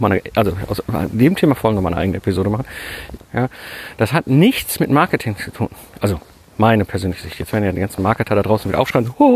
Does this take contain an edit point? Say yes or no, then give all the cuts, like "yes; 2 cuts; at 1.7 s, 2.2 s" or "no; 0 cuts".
yes; 1 cut; at 3.2 s